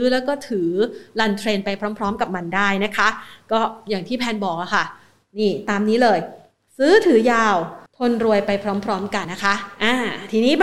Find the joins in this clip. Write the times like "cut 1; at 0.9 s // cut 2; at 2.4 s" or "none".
cut 1; at 7.9 s // cut 2; at 9.2 s